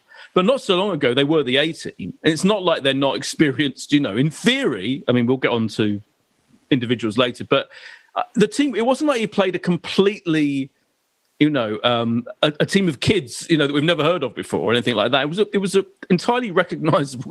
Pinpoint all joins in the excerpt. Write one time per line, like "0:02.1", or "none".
none